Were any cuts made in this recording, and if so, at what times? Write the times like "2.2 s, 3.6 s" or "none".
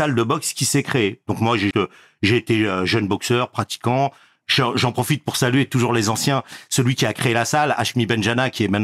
1.7 s